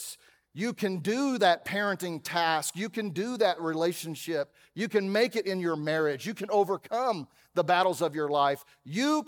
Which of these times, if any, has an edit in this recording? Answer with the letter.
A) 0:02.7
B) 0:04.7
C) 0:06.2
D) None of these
D